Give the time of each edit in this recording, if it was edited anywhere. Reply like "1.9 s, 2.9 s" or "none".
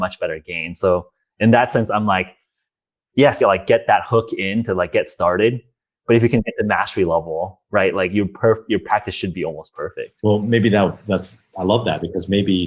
3.4 s